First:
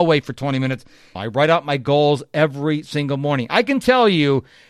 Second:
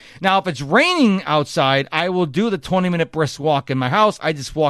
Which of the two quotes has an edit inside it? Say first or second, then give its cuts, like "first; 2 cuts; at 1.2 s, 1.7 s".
first; 1 cut; at 1.2 s